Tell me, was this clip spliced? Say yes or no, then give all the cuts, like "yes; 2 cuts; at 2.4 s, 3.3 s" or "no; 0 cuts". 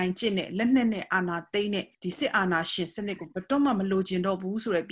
yes; 1 cut; at 1.9 s